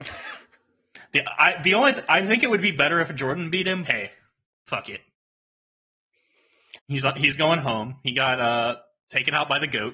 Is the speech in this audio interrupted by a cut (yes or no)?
yes